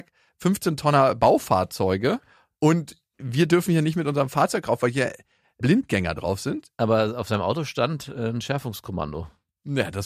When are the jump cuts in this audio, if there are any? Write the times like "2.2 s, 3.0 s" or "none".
none